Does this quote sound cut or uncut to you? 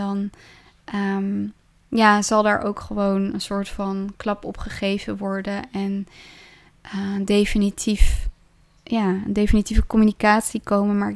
uncut